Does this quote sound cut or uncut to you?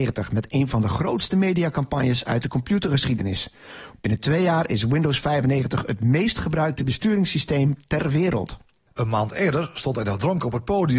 cut